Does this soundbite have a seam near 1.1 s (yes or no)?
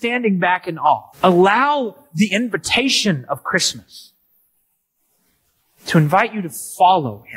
yes